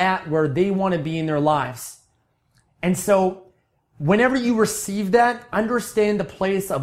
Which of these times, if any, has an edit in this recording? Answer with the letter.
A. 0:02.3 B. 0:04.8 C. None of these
C